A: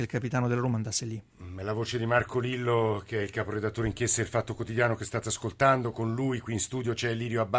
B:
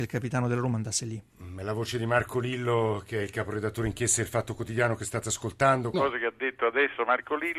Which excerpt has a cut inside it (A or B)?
B